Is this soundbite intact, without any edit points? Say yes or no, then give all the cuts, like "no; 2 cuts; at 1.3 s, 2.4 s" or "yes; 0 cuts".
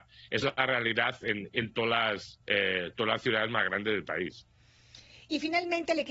no; 1 cut; at 2.4 s